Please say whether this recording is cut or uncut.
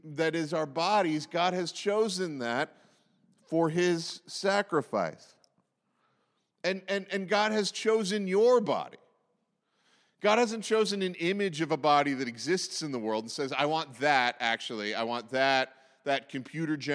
uncut